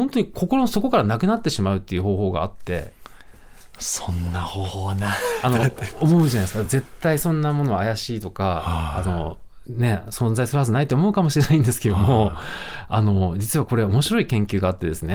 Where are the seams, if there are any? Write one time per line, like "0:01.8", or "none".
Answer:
none